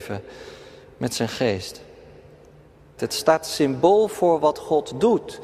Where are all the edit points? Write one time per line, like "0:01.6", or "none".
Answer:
0:03.0